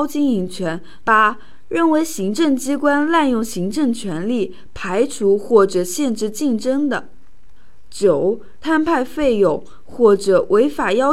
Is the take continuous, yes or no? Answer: no